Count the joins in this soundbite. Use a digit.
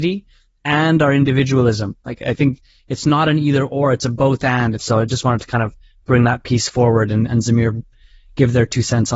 2